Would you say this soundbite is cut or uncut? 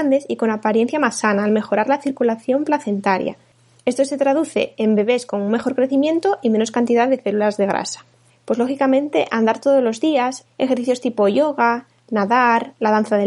cut